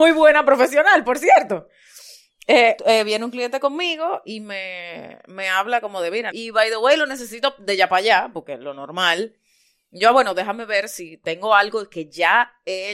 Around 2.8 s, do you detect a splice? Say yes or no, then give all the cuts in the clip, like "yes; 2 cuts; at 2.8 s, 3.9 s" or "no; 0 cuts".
yes; 2 cuts; at 2.8 s, 6.3 s